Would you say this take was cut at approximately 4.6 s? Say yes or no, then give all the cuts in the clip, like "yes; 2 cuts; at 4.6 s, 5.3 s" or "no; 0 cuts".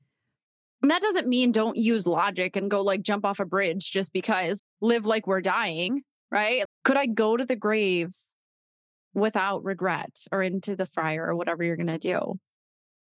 yes; 2 cuts; at 4.6 s, 6.7 s